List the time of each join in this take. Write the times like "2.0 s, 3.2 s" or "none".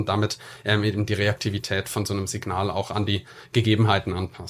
none